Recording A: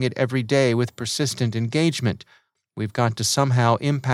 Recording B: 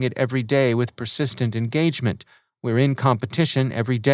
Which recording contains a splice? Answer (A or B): A